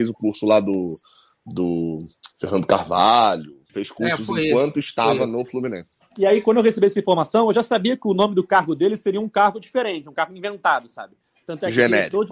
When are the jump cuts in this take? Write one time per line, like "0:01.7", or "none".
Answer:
0:03.7

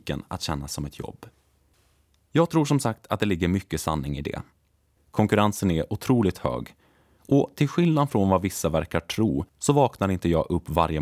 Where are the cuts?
0:05.0
0:09.5

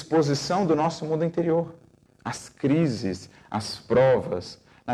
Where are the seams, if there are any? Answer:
0:02.1

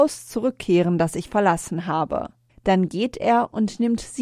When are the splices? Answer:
0:02.5

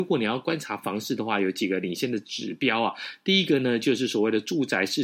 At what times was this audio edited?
none

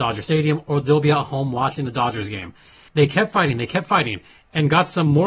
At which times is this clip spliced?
0:02.9

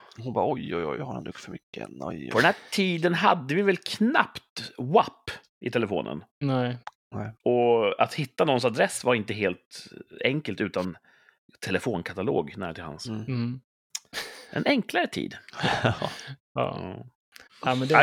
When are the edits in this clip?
none

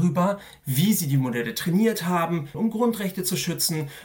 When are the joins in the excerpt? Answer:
0:02.5

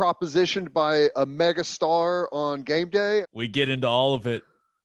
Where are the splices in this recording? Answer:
0:01.1
0:03.2

